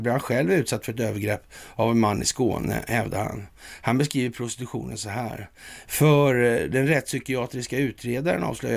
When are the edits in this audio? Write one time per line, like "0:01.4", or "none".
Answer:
0:05.9